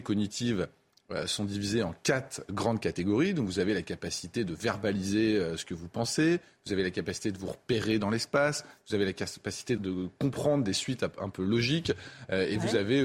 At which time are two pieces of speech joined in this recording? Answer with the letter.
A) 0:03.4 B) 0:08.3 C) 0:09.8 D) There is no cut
C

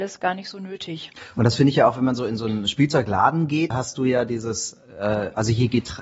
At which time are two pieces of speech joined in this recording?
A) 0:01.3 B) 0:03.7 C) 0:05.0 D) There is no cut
B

